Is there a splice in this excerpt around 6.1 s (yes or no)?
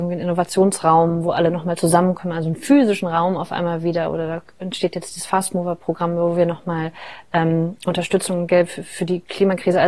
no